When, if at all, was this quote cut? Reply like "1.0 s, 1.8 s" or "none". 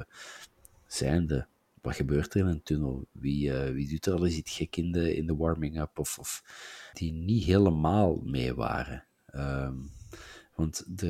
6.9 s